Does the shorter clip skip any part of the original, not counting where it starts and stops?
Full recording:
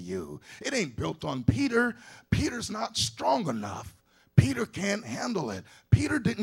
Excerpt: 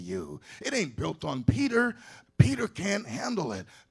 yes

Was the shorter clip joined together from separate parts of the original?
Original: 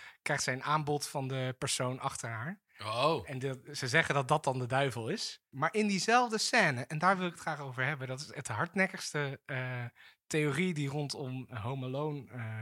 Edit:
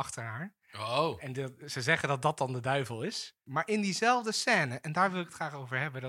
no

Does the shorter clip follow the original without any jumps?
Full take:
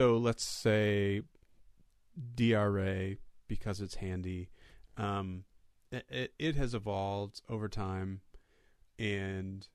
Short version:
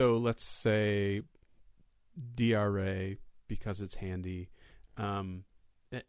yes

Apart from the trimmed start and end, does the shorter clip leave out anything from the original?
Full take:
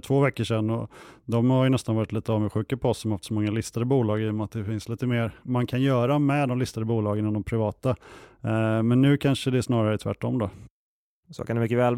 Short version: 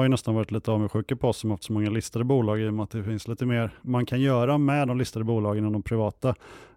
no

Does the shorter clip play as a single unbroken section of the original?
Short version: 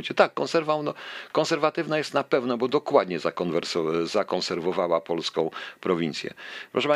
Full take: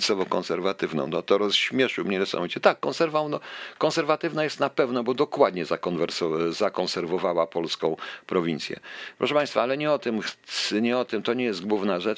yes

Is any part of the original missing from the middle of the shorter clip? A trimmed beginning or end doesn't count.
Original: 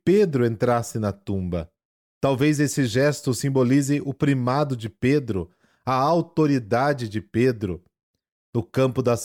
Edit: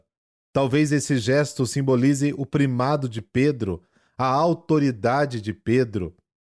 no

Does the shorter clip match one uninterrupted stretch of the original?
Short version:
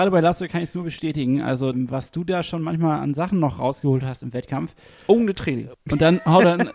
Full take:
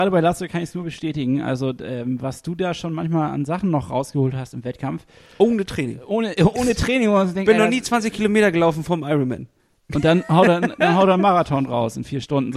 no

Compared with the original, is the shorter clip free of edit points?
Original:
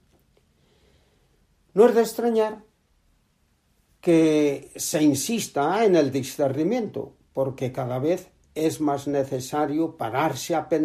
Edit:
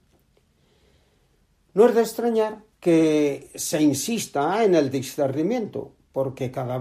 no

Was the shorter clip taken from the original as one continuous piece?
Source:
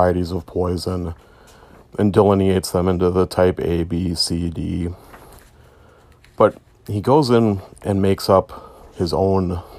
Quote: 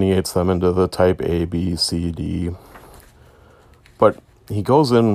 yes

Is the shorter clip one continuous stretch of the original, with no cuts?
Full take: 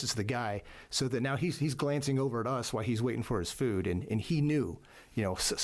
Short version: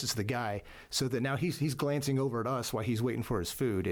yes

